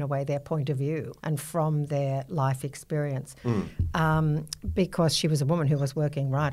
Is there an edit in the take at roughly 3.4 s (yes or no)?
yes